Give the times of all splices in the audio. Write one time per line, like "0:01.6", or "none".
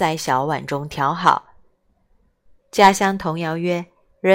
0:02.6